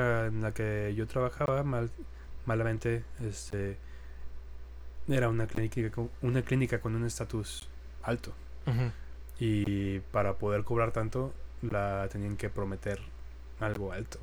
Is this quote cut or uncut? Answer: uncut